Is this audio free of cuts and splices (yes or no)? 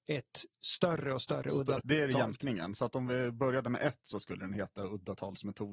no